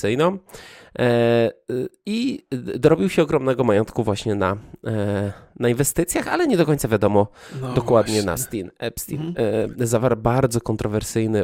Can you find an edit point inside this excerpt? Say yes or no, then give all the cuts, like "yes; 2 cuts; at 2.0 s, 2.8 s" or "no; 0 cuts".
yes; 2 cuts; at 8.3 s, 9.7 s